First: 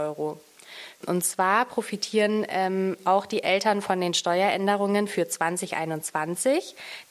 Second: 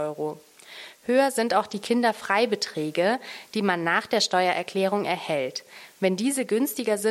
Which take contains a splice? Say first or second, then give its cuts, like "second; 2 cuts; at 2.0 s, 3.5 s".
first; 1 cut; at 1.0 s